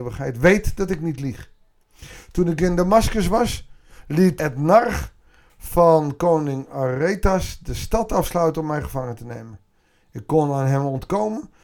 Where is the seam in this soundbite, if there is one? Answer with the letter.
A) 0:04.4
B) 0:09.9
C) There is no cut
A